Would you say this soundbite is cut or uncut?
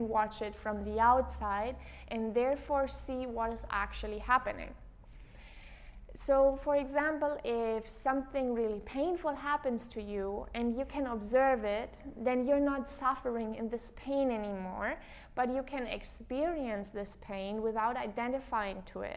uncut